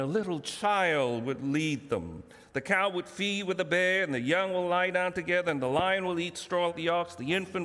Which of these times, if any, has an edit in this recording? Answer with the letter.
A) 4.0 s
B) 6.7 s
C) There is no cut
B